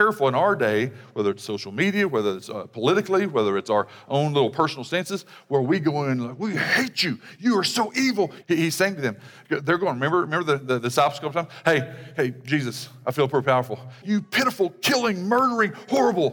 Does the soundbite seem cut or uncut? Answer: cut